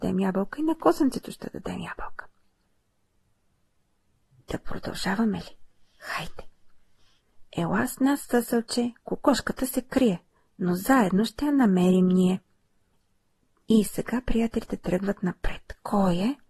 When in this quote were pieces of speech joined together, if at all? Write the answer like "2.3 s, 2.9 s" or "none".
none